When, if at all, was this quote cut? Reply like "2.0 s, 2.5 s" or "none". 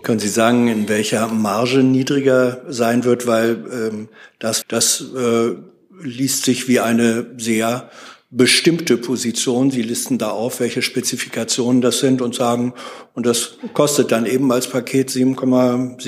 4.6 s